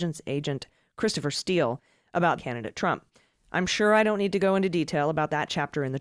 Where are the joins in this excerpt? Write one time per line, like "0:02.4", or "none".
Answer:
0:02.4